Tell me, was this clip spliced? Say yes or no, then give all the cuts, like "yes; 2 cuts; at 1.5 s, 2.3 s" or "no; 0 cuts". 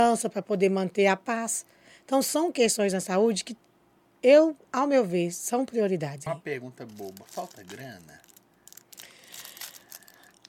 yes; 1 cut; at 6.3 s